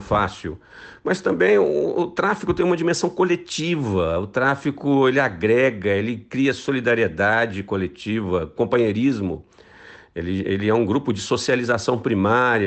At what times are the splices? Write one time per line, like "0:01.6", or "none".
none